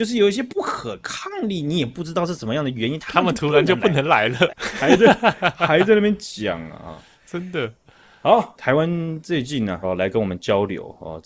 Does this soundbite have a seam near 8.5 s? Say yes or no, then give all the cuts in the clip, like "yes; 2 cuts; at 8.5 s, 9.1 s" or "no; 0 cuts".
yes; 3 cuts; at 4.5 s, 8.5 s, 9.8 s